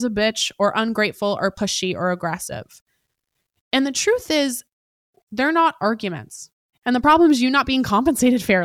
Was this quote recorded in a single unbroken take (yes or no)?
no